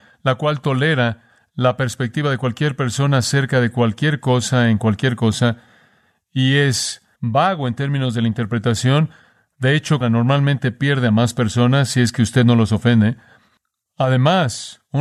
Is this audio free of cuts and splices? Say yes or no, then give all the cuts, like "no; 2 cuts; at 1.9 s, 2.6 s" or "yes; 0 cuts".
no; 2 cuts; at 7.2 s, 10.0 s